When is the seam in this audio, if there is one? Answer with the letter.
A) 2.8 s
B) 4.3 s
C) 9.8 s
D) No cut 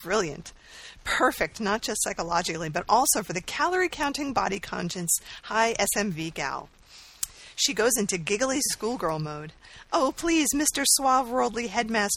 D